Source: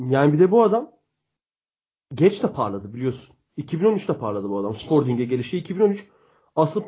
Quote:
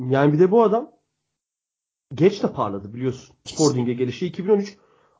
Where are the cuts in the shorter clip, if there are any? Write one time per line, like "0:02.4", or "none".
0:03.5